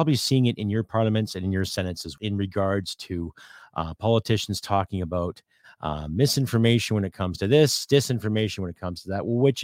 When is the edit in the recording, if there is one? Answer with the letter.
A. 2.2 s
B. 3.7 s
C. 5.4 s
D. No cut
A